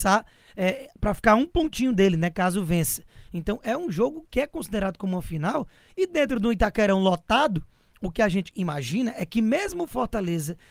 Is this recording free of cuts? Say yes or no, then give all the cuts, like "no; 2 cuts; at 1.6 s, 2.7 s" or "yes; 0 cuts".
yes; 0 cuts